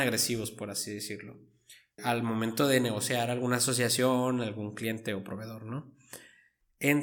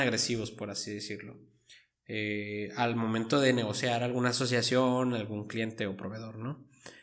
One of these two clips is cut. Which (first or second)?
first